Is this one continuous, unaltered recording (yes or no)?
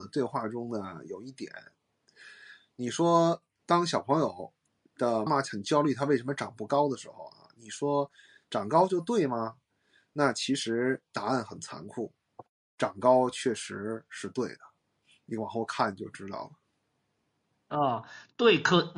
no